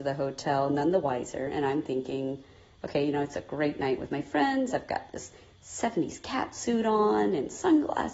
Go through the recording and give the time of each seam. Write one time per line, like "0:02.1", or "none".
none